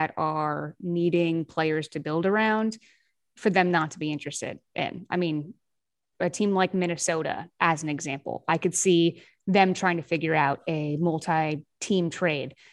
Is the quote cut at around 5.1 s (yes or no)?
no